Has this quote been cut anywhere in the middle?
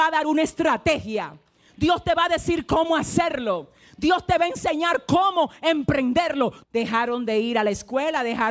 yes; 1 cut; at 6.6 s

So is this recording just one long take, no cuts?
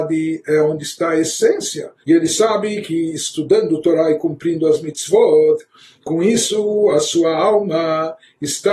no; 1 cut; at 2.0 s

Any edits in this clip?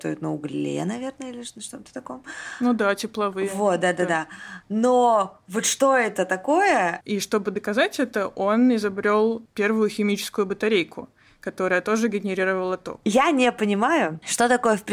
yes; 2 cuts; at 7.0 s, 13.0 s

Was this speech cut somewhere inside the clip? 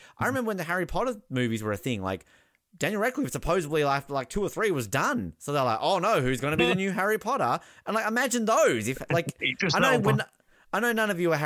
no; 0 cuts

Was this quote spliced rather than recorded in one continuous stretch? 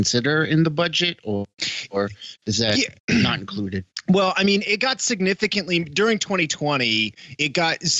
no; 0 cuts

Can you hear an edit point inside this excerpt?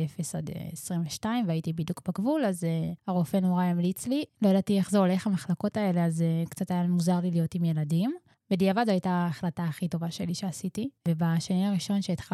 yes; 3 cuts; at 4.3 s, 8.4 s, 11.0 s

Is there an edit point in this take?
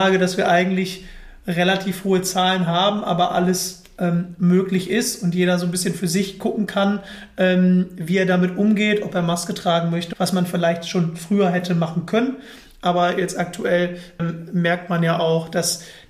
yes; 2 cuts; at 10.1 s, 14.2 s

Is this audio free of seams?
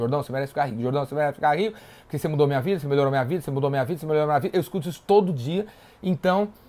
yes; 0 cuts

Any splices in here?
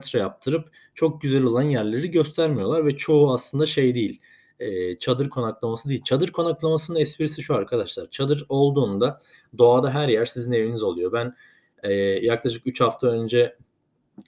no; 0 cuts

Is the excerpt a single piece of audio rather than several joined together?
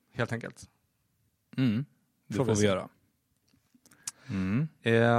no; 1 cut; at 4.1 s

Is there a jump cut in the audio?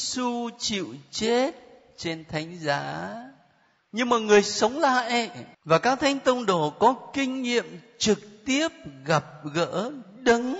yes; 2 cuts; at 3.8 s, 5.5 s

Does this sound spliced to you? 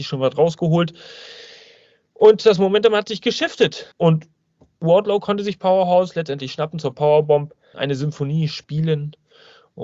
yes; 2 cuts; at 3.9 s, 7.7 s

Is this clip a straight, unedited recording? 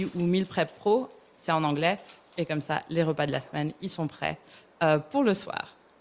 no; 1 cut; at 2.4 s

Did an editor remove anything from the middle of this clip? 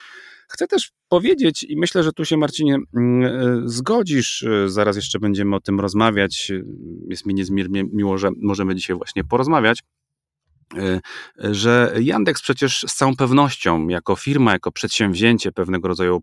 no; 0 cuts

